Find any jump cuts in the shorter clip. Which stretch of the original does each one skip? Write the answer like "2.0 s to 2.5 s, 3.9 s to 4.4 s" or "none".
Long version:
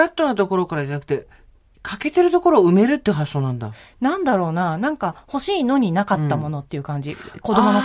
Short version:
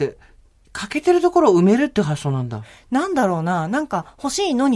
none